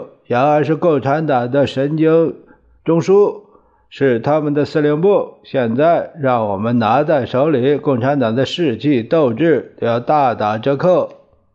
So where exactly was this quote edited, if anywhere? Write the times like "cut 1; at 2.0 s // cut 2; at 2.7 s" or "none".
none